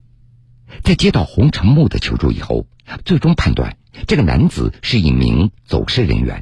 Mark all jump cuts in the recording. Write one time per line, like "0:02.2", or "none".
0:03.0